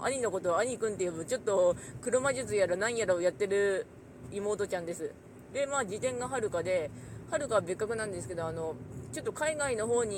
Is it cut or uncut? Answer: uncut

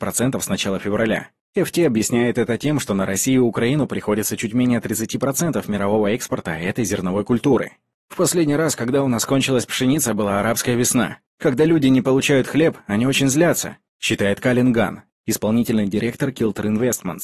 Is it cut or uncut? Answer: uncut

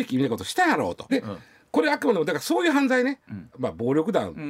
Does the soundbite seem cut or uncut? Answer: cut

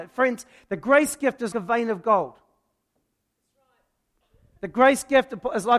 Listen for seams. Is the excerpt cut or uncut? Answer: cut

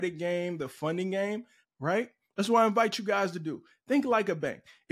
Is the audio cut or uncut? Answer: cut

